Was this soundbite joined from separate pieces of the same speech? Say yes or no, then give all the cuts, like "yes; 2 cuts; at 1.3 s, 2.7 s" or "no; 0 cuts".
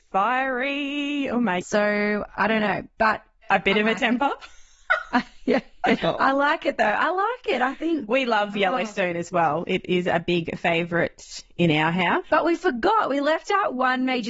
yes; 3 cuts; at 1.6 s, 6.0 s, 12.2 s